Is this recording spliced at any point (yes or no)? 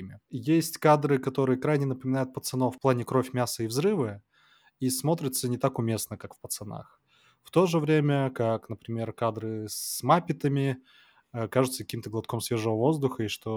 no